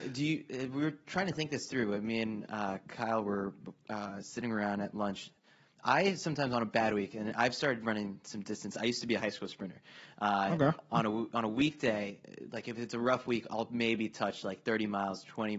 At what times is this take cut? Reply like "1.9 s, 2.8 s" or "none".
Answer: none

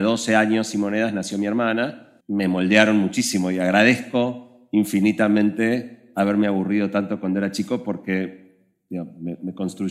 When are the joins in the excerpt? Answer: 2.2 s

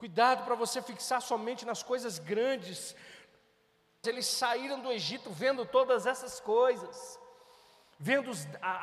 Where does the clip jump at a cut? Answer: 4.0 s

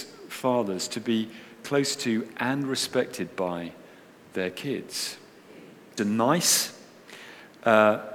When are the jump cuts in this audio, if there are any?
6.0 s

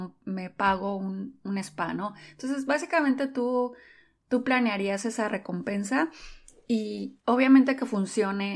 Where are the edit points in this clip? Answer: none

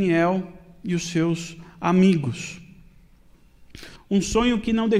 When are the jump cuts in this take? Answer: 4.0 s

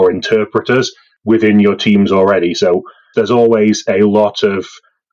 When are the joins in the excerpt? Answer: 3.1 s

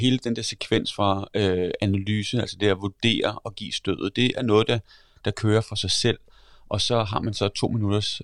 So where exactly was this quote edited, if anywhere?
none

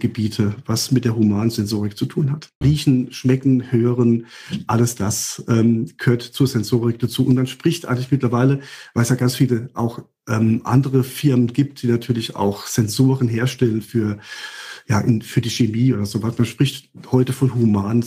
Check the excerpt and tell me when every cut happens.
2.6 s

